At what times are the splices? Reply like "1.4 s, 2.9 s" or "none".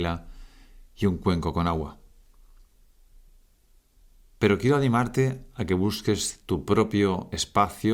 none